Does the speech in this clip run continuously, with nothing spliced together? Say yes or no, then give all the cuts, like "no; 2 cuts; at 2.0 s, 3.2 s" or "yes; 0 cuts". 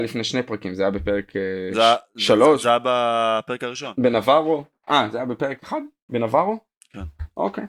yes; 0 cuts